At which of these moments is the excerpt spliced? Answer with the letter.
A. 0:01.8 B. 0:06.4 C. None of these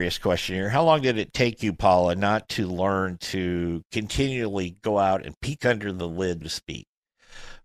B